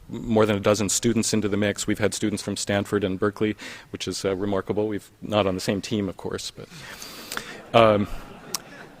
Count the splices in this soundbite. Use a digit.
1